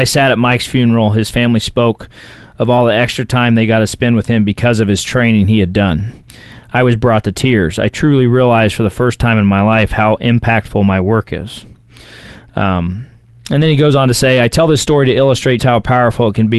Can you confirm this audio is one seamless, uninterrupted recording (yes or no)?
no